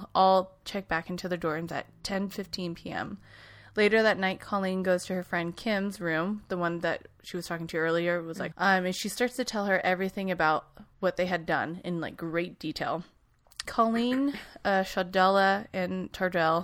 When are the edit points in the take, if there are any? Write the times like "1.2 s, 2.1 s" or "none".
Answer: 8.5 s, 13.6 s